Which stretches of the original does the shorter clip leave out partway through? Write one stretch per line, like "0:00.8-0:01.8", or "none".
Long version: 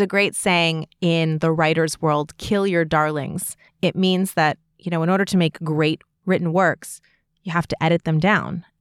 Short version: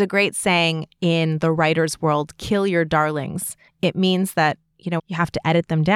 0:05.0-0:07.3